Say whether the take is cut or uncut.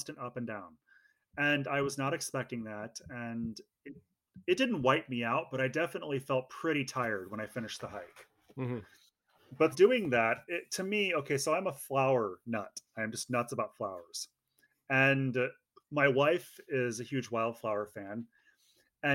cut